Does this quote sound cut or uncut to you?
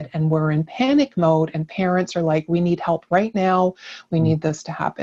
uncut